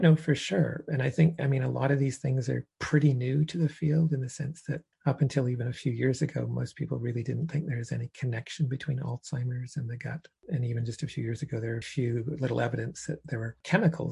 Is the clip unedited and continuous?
no; 2 cuts; at 4.9 s, 11.8 s

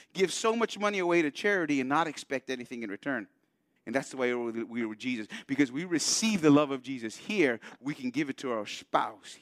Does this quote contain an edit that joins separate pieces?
yes; 1 cut; at 3.8 s

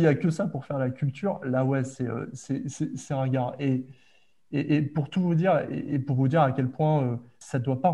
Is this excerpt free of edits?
yes; 0 cuts

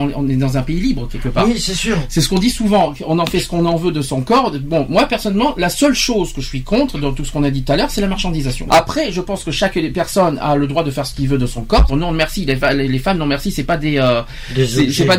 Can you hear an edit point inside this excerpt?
yes; 2 cuts; at 8.7 s, 11.9 s

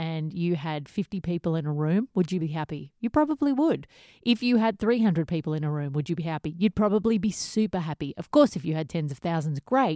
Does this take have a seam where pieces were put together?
no; 0 cuts

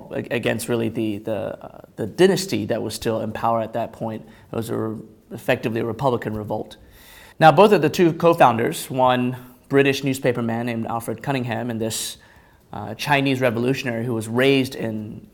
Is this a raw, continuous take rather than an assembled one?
no; 1 cut; at 7.3 s

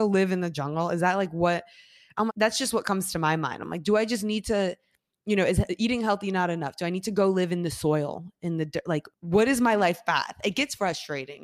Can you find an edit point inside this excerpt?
yes; 2 cuts; at 2.3 s, 9.1 s

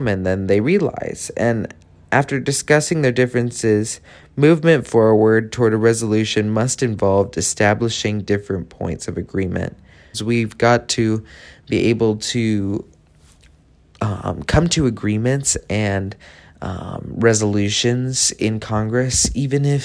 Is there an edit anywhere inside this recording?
yes; 1 cut; at 10.1 s

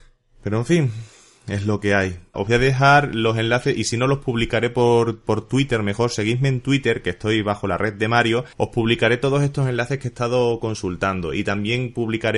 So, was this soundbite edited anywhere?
yes; 2 cuts; at 2.3 s, 8.5 s

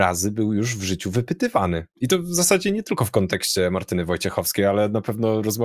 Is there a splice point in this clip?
no; 0 cuts

